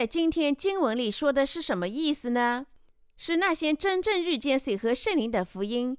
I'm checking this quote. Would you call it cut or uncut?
uncut